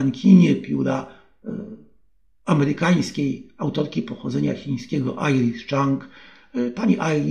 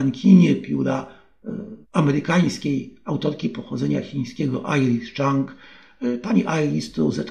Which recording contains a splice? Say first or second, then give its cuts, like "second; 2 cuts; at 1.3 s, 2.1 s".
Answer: second; 1 cut; at 1.8 s